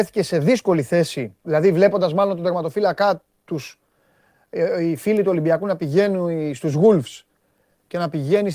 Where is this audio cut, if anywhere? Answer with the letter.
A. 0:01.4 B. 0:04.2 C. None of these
A